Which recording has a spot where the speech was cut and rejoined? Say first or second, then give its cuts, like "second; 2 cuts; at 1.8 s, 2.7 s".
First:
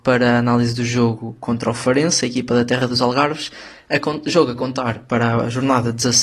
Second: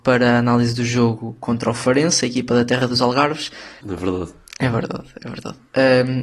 second; 1 cut; at 3.8 s